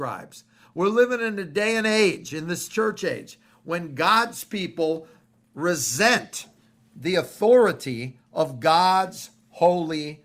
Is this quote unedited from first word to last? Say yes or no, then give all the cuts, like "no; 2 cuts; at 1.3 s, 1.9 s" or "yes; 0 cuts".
yes; 0 cuts